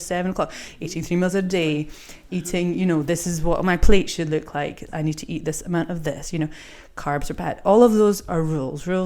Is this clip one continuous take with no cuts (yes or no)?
no